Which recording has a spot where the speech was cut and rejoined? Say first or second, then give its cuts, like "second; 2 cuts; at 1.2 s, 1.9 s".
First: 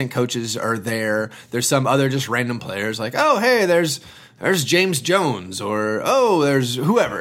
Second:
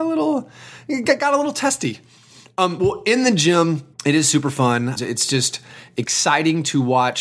second; 2 cuts; at 3.9 s, 5.0 s